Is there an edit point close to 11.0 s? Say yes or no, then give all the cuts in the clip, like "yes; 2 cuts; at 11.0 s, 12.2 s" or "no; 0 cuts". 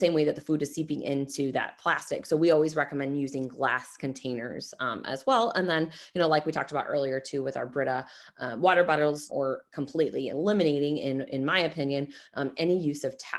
no; 1 cut; at 9.3 s